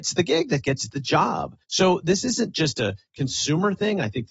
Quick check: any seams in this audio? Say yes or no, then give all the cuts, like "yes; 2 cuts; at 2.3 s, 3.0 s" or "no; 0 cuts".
yes; 1 cut; at 1.6 s